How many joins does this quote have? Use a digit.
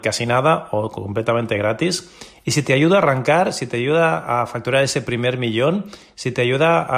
0